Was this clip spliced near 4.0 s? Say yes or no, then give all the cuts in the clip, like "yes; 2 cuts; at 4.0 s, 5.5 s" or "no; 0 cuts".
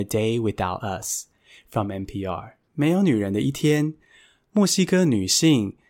no; 1 cut; at 2.7 s